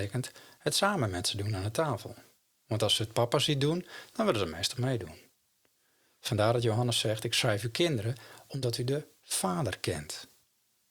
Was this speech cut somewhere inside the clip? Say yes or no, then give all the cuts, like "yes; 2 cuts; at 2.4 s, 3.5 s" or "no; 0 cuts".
no; 0 cuts